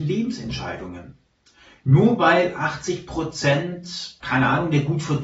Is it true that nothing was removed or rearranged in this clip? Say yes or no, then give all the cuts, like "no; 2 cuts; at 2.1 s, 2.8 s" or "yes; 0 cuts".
yes; 0 cuts